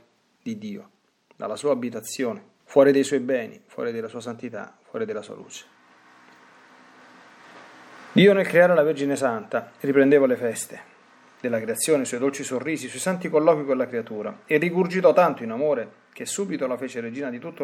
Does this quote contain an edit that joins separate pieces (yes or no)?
yes